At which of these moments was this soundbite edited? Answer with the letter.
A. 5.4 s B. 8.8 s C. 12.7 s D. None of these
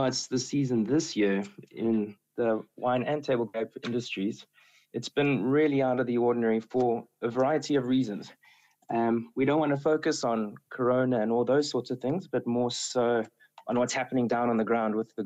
D